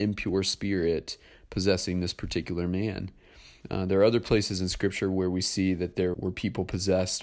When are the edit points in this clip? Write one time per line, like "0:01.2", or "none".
0:03.6
0:06.1